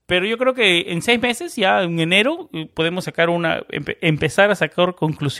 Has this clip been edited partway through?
no; 0 cuts

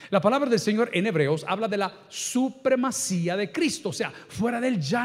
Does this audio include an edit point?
no; 0 cuts

